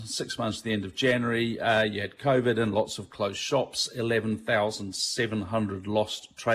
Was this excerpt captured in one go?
yes; 0 cuts

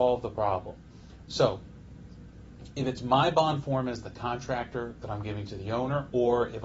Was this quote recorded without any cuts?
no; 1 cut; at 1.3 s

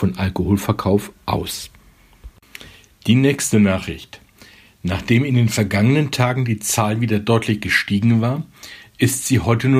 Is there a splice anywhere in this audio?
no; 0 cuts

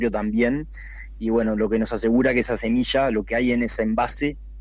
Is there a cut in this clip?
no; 0 cuts

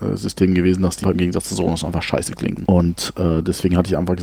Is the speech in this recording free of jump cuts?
no; 2 cuts; at 1.0 s, 2.7 s

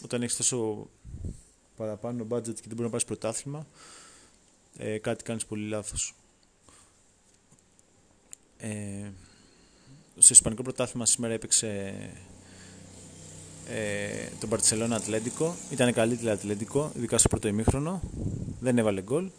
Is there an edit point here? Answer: yes; 1 cut; at 10.1 s

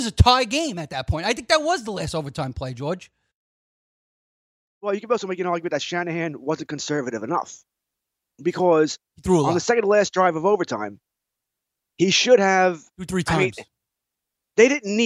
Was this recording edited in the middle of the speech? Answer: no; 0 cuts

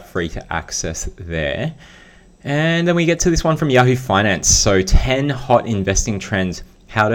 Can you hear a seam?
no; 0 cuts

